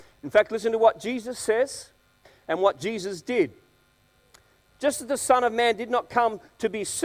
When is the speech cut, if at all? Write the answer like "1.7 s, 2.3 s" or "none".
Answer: 4.7 s